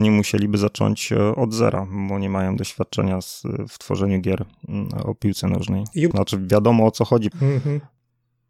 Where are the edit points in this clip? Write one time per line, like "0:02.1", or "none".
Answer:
0:06.1
0:07.3